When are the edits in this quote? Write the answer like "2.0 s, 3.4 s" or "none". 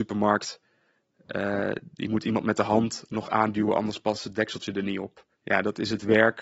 5.3 s

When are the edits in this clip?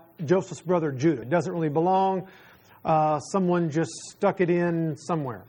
1.2 s

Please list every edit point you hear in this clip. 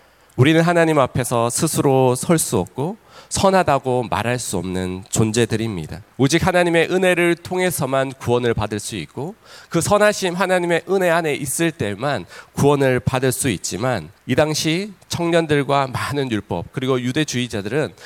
6.1 s, 14.2 s

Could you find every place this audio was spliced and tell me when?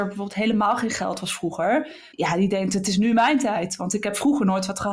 2.1 s

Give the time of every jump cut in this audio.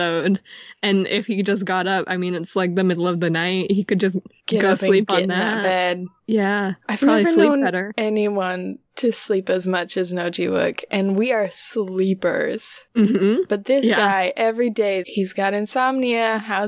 15.0 s

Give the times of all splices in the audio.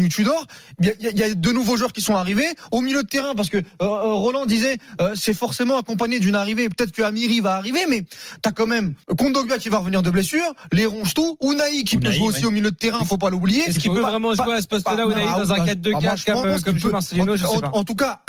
9.0 s, 16.4 s

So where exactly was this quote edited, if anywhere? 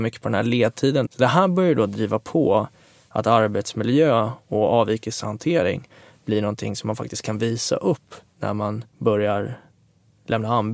1.1 s, 8.9 s

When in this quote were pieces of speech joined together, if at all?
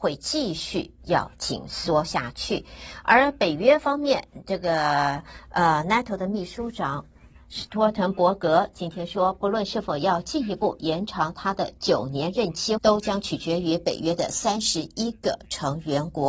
12.8 s

